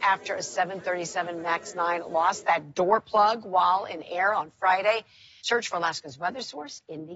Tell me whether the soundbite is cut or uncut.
cut